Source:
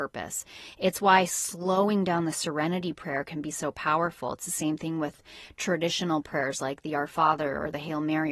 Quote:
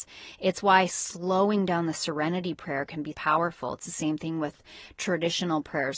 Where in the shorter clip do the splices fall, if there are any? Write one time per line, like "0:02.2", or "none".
0:03.1